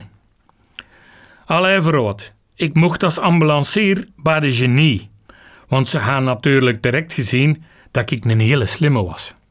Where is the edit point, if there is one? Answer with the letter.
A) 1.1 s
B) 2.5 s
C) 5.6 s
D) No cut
D